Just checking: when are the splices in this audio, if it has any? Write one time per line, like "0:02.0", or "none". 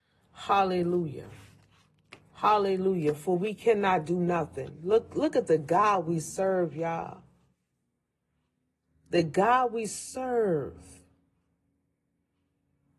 none